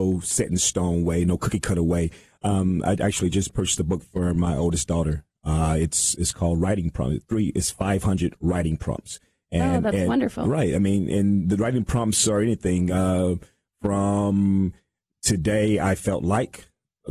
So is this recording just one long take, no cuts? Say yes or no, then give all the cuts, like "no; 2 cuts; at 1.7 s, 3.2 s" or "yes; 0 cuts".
yes; 0 cuts